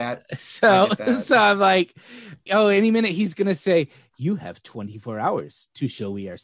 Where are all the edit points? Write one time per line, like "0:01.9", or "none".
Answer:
0:02.5